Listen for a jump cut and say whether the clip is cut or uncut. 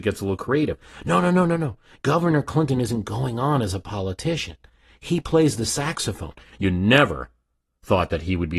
cut